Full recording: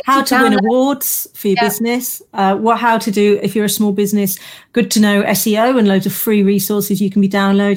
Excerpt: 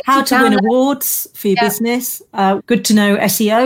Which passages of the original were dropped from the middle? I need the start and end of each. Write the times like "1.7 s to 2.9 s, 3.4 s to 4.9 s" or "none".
2.6 s to 4.6 s

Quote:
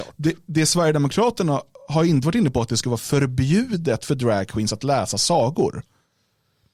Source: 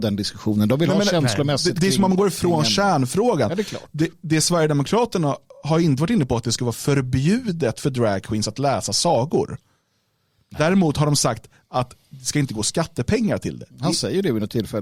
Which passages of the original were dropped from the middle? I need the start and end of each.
none

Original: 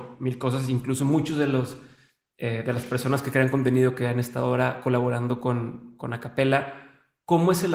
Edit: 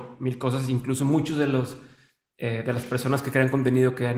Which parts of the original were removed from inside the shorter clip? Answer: none

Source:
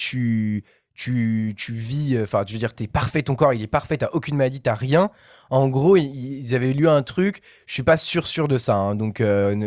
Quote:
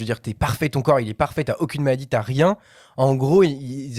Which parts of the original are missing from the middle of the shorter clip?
none

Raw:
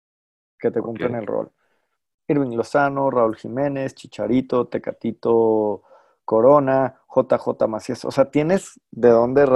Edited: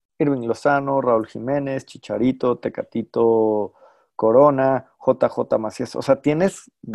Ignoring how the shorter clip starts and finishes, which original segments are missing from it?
none

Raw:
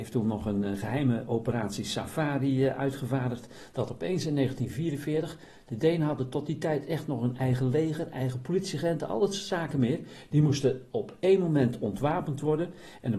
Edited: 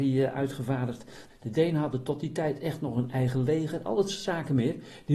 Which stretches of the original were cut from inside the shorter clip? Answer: 3.7 s to 5.5 s, 8.1 s to 9.1 s

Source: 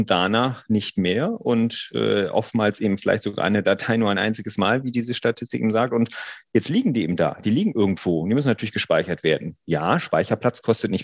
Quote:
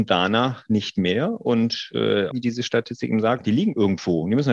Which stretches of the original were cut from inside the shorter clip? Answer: 2.3 s to 4.8 s, 5.9 s to 7.4 s

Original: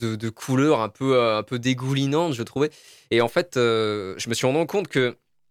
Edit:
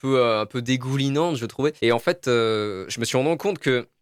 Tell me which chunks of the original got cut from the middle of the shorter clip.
2.7 s to 3.1 s

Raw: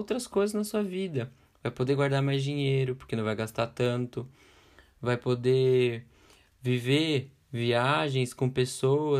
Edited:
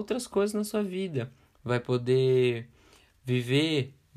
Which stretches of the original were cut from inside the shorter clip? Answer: 1.6 s to 4.9 s

